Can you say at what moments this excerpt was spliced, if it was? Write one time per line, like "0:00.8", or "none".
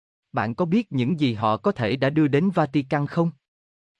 none